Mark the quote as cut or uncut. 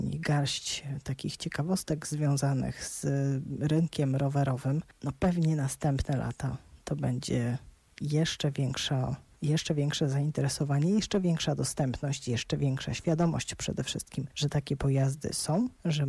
uncut